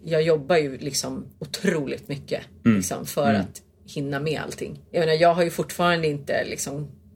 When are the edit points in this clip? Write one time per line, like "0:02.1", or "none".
0:01.3